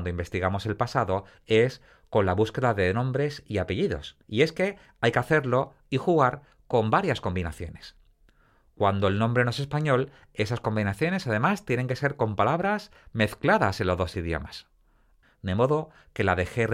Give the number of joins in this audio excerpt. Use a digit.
2